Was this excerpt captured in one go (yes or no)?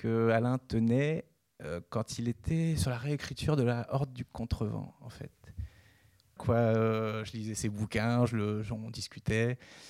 no